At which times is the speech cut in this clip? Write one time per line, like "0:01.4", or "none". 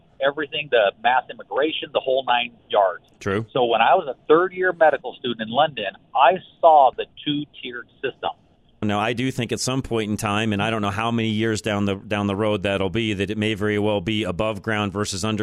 0:02.6
0:08.8